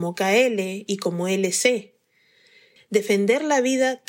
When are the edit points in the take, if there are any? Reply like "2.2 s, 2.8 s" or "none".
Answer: 2.8 s